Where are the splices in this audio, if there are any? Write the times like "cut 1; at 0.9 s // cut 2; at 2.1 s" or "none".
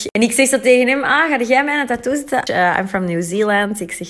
cut 1; at 2.5 s